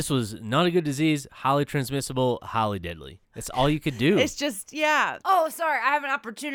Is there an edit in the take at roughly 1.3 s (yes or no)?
no